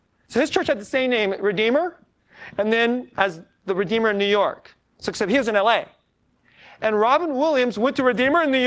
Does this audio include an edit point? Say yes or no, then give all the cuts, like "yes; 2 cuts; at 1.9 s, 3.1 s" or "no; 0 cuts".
no; 0 cuts